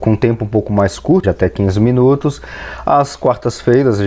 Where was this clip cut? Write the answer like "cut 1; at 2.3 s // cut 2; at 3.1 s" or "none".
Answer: cut 1; at 1.2 s